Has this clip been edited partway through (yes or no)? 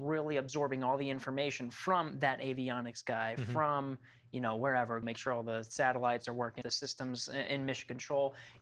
yes